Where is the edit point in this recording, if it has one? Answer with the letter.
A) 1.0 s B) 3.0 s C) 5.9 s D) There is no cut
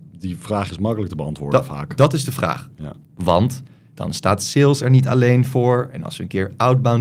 B